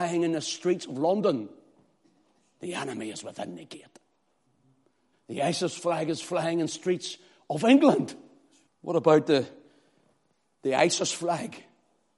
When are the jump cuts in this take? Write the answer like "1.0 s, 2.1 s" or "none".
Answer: 5.1 s, 8.7 s